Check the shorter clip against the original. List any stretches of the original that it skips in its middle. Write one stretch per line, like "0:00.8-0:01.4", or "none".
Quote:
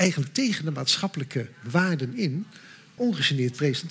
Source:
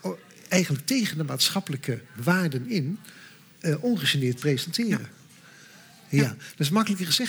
0:03.5-0:03.8

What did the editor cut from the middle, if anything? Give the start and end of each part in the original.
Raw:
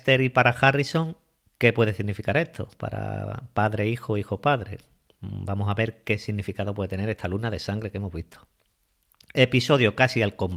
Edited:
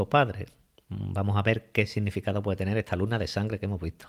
none

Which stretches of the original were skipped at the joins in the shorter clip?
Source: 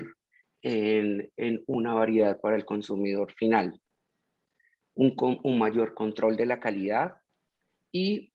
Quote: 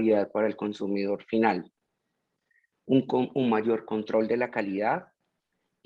none

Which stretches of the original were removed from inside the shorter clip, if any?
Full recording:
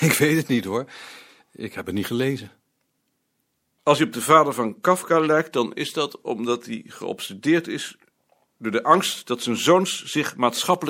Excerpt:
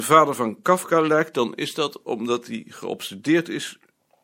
none

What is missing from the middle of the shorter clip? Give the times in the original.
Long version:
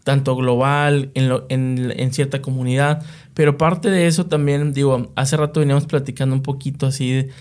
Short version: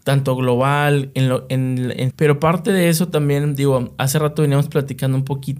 0:02.1-0:03.3

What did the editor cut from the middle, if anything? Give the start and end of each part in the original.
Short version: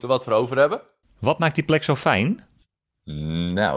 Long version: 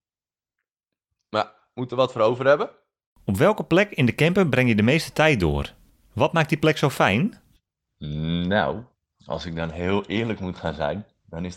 0:02.9-0:06.0

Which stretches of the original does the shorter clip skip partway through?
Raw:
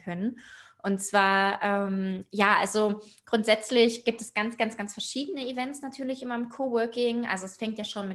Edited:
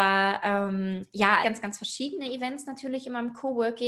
0:02.6-0:04.6

